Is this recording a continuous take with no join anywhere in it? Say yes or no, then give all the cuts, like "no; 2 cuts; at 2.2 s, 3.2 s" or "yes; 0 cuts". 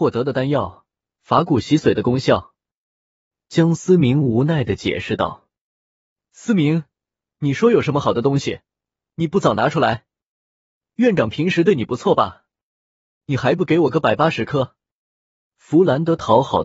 yes; 0 cuts